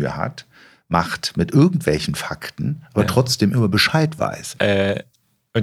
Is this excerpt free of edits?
no; 1 cut; at 4.6 s

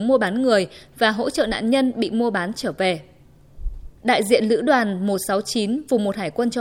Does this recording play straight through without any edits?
no; 1 cut; at 4.0 s

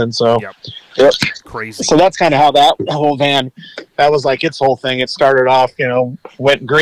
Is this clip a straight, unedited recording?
yes; 0 cuts

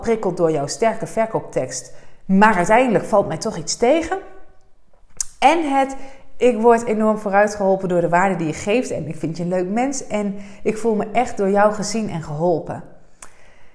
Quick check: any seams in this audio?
no; 0 cuts

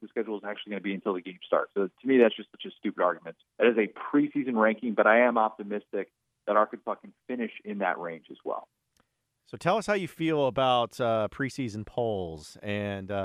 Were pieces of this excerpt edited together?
yes; 1 cut; at 3.4 s

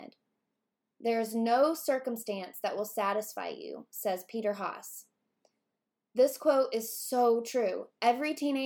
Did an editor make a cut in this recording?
no; 0 cuts

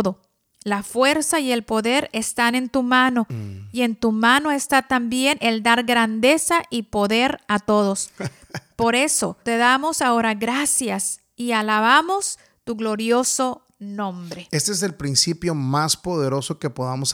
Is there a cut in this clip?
yes; 1 cut; at 9.4 s

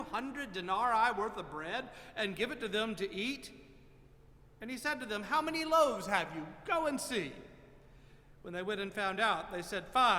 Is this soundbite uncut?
yes; 0 cuts

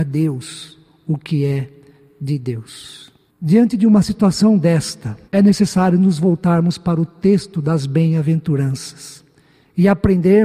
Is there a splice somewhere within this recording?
yes; 2 cuts; at 3.3 s, 5.3 s

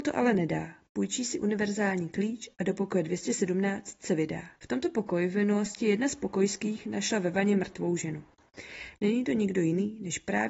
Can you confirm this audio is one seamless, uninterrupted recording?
no; 2 cuts; at 4.6 s, 9.0 s

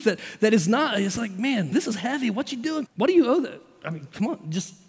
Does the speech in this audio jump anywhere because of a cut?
yes; 2 cuts; at 1.7 s, 2.9 s

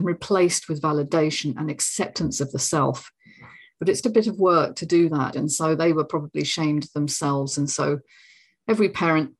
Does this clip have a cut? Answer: yes; 2 cuts; at 4.0 s, 5.3 s

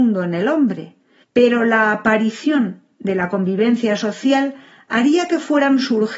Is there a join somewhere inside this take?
yes; 1 cut; at 1.2 s

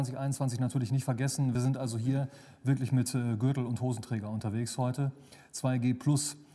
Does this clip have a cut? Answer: no; 0 cuts

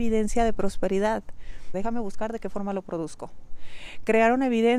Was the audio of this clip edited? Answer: yes; 1 cut; at 1.7 s

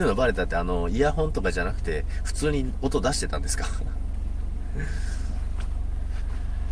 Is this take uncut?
yes; 0 cuts

